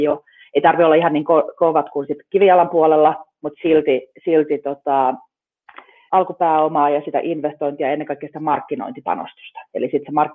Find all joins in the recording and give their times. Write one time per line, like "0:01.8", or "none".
0:06.1